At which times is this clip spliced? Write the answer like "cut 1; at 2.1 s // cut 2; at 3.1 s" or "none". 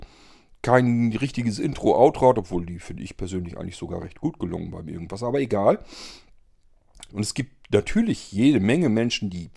cut 1; at 7.1 s

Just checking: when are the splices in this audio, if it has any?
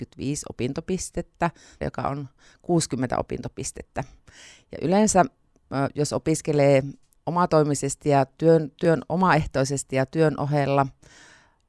cut 1; at 1.8 s

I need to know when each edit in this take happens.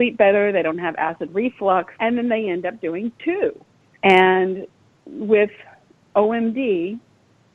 cut 1; at 1.9 s // cut 2; at 4.0 s

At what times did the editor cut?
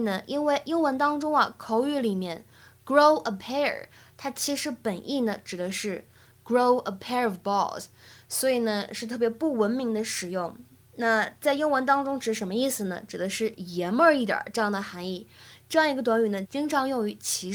cut 1; at 16.4 s

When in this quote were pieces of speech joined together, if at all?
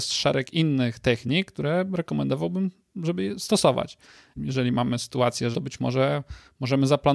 cut 1; at 4.4 s // cut 2; at 5.5 s

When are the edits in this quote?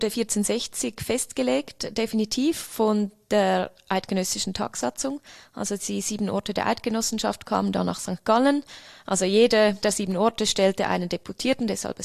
none

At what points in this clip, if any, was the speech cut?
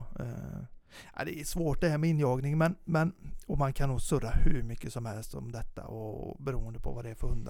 none

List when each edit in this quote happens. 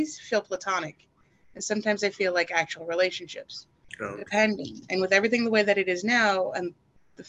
none

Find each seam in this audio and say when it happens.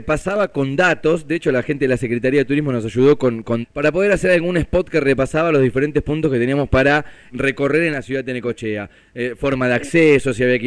cut 1; at 3.6 s // cut 2; at 7.3 s

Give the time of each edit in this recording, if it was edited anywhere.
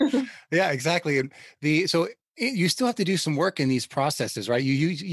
none

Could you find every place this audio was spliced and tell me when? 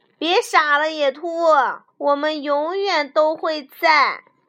cut 1; at 1.9 s

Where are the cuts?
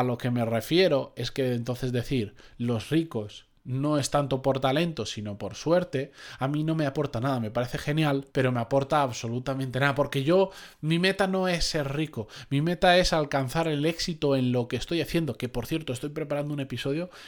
cut 1; at 8.3 s

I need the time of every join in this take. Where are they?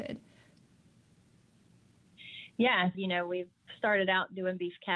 cut 1; at 2.9 s

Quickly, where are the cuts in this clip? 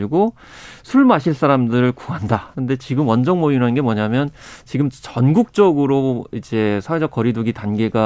cut 1; at 2.5 s

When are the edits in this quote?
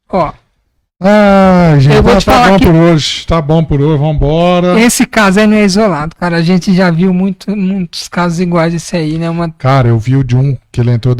none

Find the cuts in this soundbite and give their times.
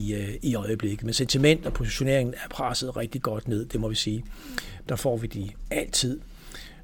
cut 1; at 4.9 s

